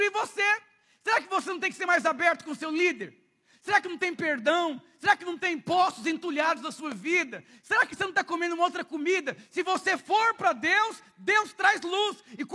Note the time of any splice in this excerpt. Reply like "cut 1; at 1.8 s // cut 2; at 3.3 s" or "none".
none

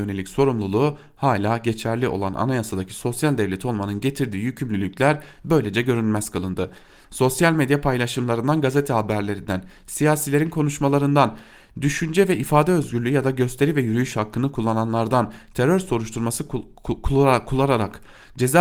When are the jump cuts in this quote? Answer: cut 1; at 7.0 s

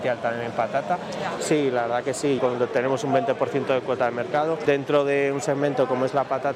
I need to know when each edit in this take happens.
cut 1; at 1.4 s // cut 2; at 2.4 s // cut 3; at 4.7 s

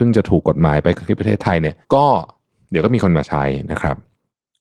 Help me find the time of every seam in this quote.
cut 1; at 1.8 s

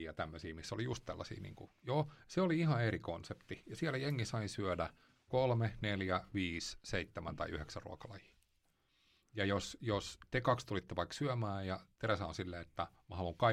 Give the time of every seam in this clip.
none

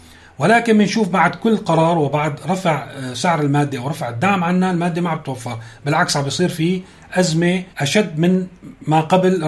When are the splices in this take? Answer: cut 1; at 7.7 s

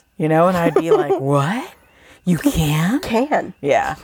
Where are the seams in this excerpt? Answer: none

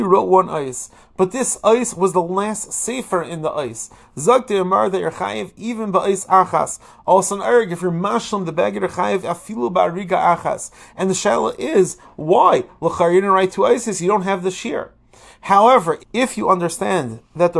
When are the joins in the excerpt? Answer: cut 1; at 16.0 s

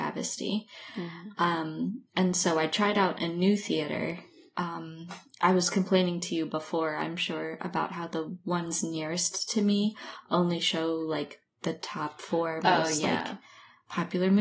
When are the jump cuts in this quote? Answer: none

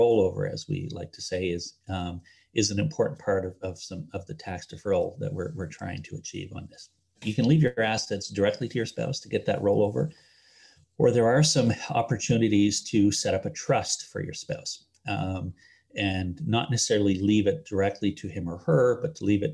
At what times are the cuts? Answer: none

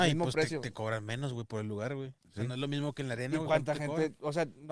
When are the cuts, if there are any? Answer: cut 1; at 2.2 s

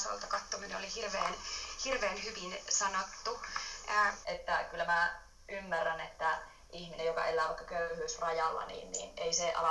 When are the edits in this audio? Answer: cut 1; at 4.2 s

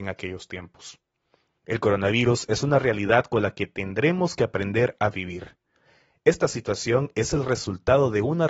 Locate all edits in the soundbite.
none

